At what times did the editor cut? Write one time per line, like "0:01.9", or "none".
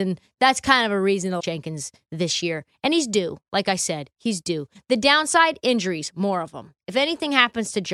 0:01.4